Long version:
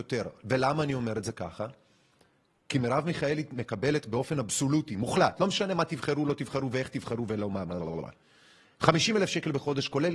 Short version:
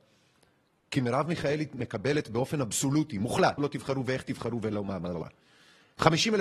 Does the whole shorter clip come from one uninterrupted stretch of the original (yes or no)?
no